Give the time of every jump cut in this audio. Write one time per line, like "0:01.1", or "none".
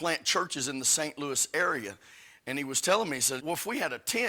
0:03.4